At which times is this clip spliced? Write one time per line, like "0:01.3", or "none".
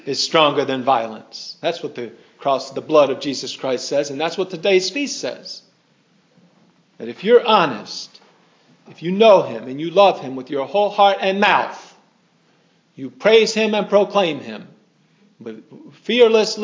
0:08.9